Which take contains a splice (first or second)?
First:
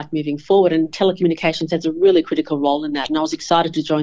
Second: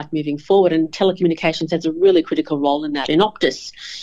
second